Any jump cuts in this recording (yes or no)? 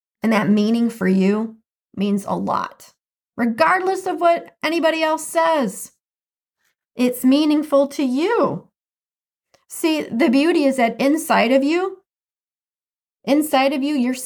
no